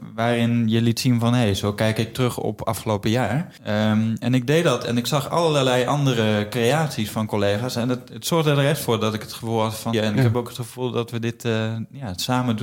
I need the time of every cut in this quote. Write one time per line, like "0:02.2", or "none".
0:03.6
0:09.9